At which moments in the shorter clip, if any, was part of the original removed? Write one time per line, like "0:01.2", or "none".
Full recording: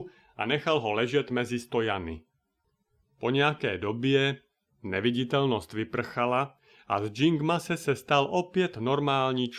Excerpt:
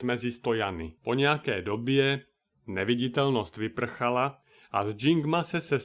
0:01.0